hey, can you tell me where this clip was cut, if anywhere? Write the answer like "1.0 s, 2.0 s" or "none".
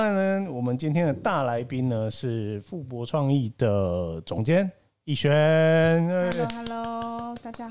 none